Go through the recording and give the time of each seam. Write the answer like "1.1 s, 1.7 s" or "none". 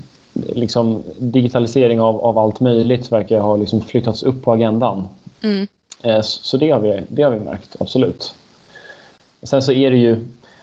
5.3 s